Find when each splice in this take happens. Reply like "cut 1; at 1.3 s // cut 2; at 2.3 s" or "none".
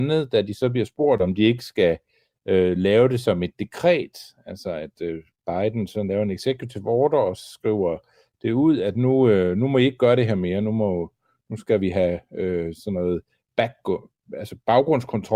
none